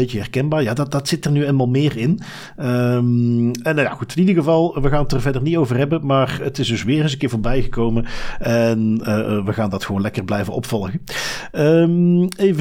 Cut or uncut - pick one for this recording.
uncut